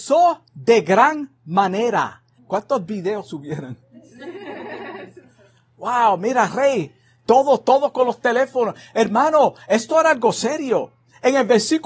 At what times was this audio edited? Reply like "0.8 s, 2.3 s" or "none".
2.4 s